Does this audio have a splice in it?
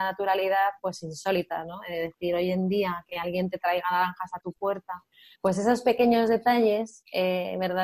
no; 0 cuts

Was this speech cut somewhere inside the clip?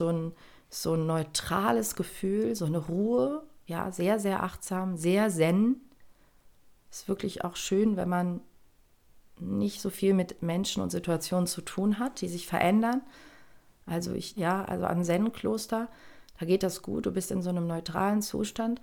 yes; 1 cut; at 14.4 s

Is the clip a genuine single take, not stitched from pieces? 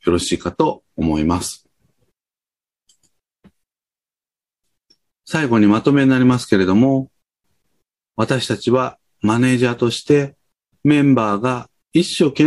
yes; 0 cuts

